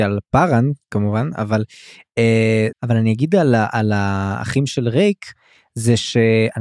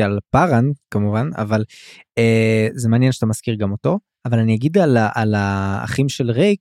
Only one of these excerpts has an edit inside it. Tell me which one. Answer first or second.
first